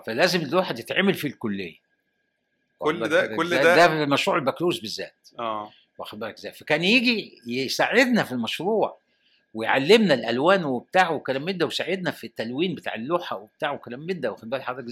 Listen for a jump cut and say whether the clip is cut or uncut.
uncut